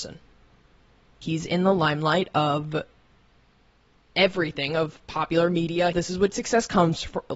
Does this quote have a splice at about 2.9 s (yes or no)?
no